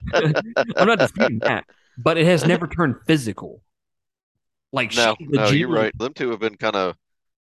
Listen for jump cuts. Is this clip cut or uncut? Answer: cut